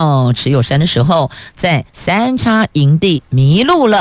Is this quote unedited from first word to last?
yes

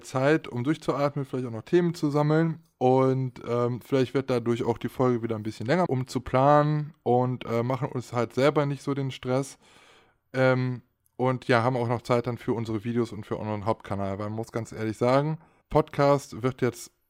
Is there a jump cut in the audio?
yes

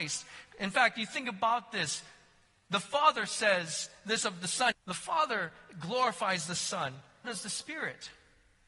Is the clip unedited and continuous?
no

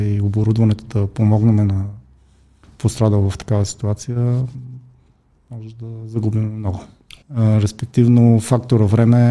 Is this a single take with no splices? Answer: no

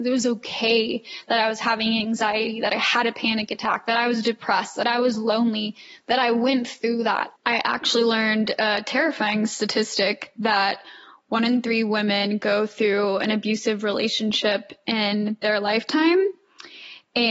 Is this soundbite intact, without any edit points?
no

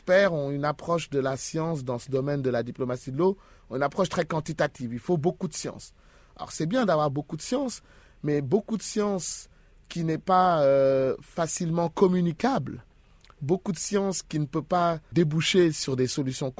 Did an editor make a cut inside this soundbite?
no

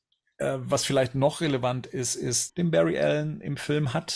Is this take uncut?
no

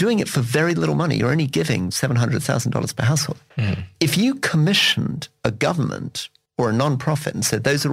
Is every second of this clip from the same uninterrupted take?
yes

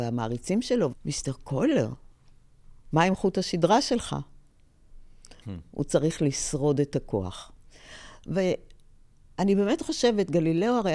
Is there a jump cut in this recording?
yes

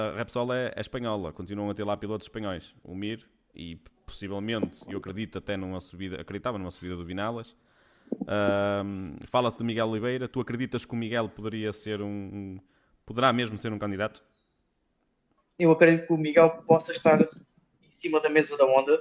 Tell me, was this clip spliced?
yes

